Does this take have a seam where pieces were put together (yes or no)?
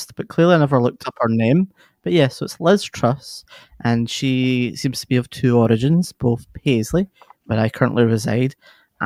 no